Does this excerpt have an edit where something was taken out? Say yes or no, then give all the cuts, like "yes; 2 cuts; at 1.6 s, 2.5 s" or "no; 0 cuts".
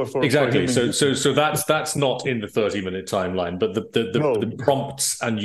no; 0 cuts